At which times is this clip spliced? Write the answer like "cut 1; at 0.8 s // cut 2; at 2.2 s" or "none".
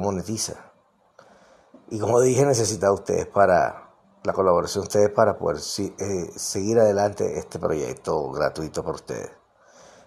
none